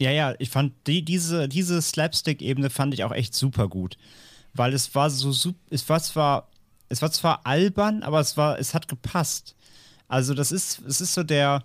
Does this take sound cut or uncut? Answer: uncut